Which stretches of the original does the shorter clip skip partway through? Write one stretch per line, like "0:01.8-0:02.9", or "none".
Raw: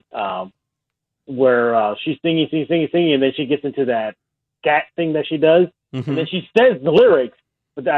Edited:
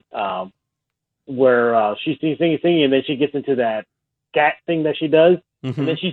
0:02.2-0:02.5